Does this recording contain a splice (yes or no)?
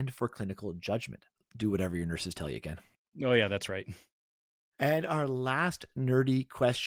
yes